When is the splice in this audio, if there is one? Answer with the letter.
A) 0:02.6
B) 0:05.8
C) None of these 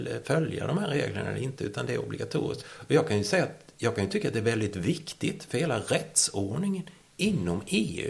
A